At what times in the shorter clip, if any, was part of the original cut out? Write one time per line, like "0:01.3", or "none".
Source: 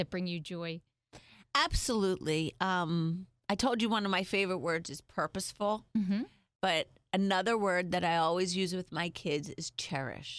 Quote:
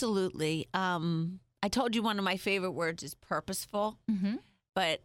none